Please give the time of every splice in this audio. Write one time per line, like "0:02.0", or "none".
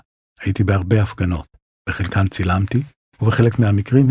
none